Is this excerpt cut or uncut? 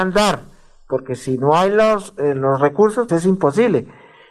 cut